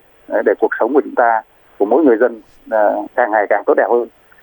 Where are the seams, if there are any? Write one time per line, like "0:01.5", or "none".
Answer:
0:03.1